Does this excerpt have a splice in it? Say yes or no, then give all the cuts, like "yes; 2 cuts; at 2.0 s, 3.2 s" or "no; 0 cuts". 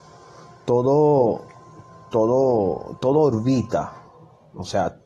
no; 0 cuts